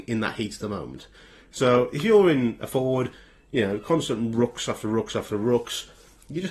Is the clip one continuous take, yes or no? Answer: yes